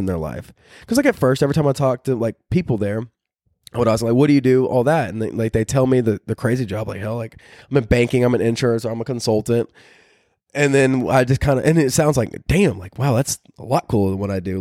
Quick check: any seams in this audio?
no; 0 cuts

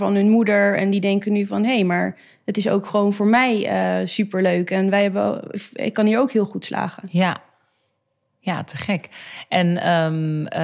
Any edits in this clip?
no; 0 cuts

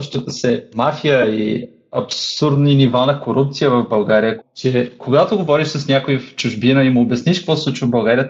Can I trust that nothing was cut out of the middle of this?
no; 1 cut; at 4.4 s

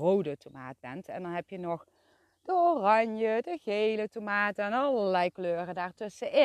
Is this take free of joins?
yes; 0 cuts

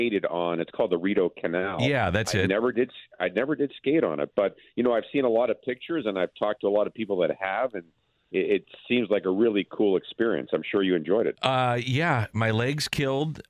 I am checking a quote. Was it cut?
no; 0 cuts

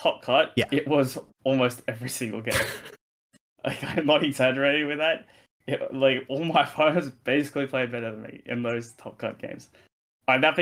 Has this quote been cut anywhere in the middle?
no; 0 cuts

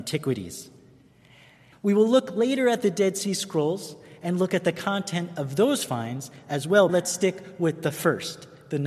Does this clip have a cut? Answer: yes; 2 cuts; at 1.7 s, 6.9 s

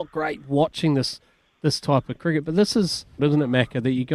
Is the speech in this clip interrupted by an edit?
yes; 1 cut; at 3.2 s

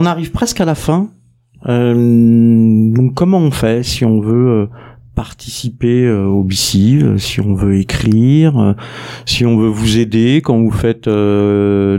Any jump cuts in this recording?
no; 0 cuts

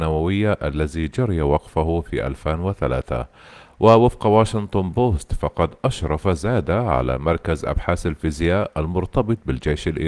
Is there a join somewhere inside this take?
no; 0 cuts

